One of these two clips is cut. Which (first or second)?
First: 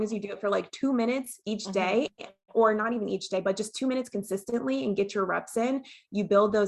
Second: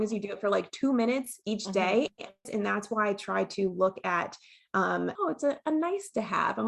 second